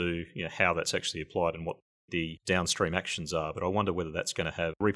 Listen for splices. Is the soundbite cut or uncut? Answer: uncut